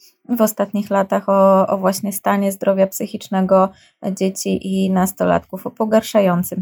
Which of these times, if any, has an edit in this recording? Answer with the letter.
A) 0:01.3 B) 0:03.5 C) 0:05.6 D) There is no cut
D